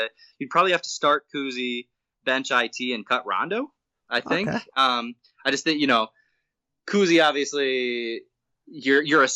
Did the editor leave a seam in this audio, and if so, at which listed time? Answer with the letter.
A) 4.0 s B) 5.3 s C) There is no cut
C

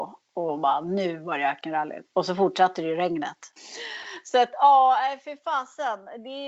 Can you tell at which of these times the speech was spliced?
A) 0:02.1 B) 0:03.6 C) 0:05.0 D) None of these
B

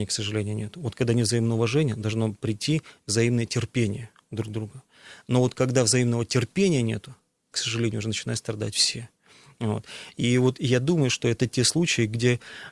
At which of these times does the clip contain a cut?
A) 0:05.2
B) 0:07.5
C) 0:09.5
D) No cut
B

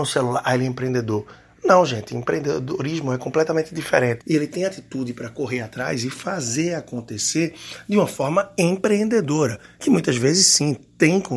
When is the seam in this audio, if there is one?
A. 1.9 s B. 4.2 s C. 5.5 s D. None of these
B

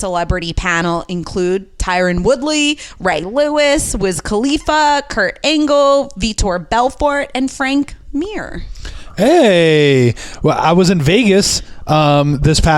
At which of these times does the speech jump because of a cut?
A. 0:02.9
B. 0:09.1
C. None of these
C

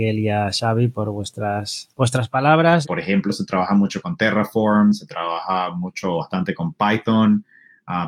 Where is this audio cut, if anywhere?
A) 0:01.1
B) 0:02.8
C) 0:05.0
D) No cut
B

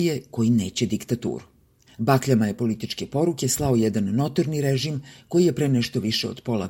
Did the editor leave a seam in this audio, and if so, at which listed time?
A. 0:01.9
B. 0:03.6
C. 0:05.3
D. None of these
A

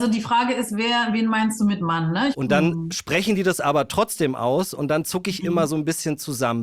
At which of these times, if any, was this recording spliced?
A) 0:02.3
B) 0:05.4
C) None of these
A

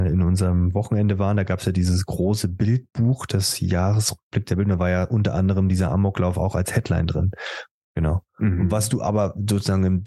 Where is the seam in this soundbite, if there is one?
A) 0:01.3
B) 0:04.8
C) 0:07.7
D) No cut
C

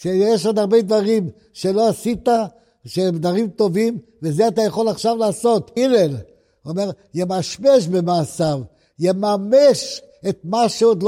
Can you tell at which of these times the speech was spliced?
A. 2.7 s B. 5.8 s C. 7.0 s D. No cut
B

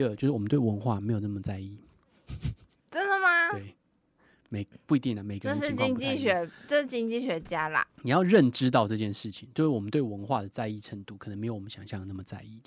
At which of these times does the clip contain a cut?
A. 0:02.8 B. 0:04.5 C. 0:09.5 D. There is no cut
A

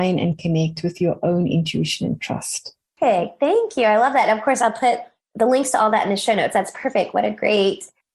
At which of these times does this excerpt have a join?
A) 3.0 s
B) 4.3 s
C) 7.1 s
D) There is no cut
A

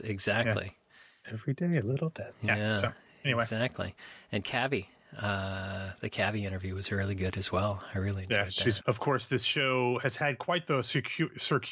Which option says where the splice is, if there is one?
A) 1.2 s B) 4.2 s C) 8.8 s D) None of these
C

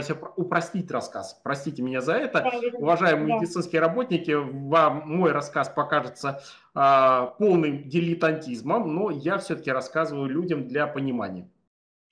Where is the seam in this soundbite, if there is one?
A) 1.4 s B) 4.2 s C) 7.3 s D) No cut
D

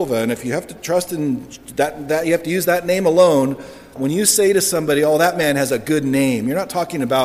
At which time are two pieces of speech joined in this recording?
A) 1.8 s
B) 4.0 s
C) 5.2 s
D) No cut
B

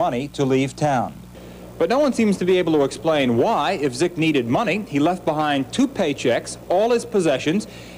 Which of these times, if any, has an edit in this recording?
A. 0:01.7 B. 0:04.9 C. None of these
C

